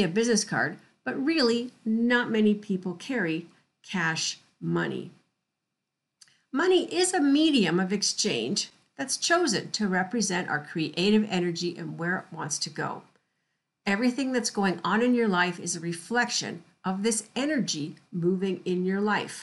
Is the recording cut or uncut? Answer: uncut